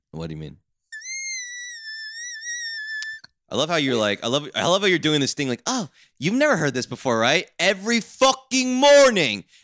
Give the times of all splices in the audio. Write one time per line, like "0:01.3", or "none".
none